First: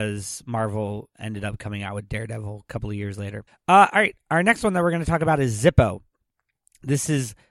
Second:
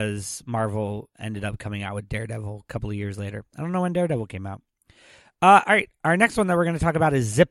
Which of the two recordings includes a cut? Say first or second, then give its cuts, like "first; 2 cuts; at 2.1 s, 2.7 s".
first; 1 cut; at 3.5 s